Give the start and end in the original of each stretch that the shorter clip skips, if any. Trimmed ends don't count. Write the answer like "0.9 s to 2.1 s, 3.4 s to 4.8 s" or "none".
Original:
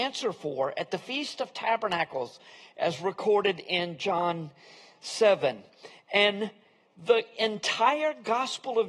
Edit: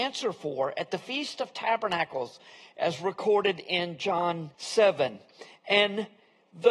4.5 s to 5.0 s